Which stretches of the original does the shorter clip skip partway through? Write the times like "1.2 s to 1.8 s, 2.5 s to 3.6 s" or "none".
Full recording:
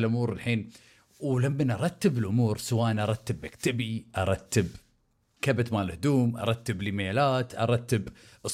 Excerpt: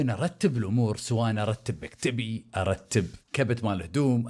4.8 s to 5.3 s